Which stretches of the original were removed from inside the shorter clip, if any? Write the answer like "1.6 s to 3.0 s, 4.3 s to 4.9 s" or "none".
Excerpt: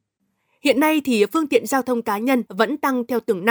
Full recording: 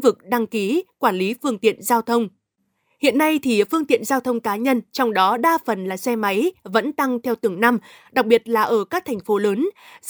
4.8 s to 6.6 s

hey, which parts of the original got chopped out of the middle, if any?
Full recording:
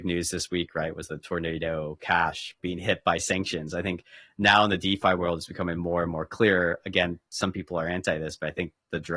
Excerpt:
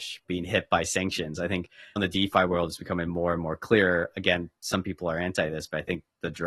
4.3 s to 4.6 s

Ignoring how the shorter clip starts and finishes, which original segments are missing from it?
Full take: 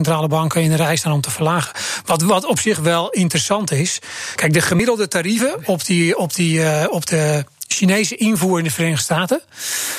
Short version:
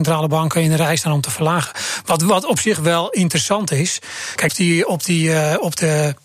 4.5 s to 5.8 s

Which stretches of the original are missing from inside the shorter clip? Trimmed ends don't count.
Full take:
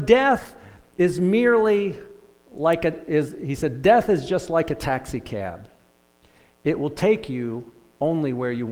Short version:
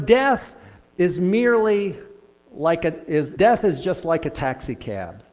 3.4 s to 3.8 s

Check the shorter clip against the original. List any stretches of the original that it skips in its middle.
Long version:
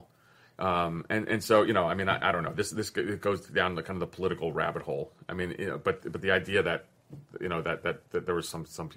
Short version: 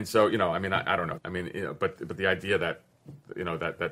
2.5 s to 5.2 s

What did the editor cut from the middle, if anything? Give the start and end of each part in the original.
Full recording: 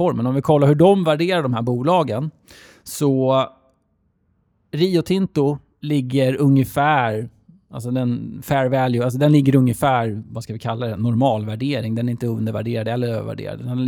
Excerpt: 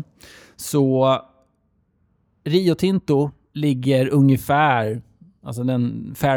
none

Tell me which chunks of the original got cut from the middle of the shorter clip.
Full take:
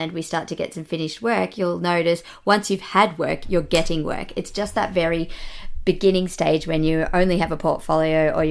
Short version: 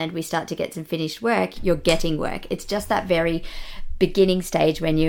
1.5 s to 3.4 s

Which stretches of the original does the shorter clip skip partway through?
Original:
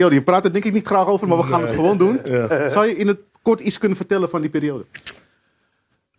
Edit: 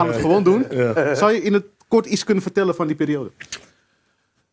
none

